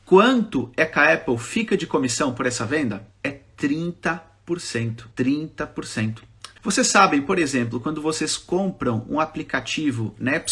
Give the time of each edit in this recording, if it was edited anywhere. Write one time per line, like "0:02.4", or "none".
0:03.1
0:05.1
0:06.6